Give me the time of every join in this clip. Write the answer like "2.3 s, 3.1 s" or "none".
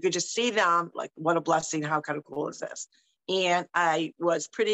0.9 s, 3.2 s